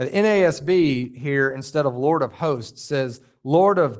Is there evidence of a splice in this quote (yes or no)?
no